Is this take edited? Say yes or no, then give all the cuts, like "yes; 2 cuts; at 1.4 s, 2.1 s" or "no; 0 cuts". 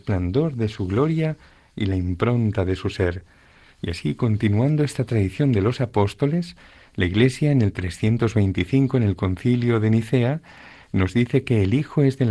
no; 0 cuts